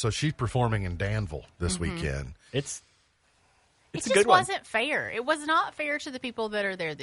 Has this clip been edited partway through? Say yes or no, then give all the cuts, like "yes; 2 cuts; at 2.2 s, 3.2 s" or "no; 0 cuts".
yes; 1 cut; at 2.5 s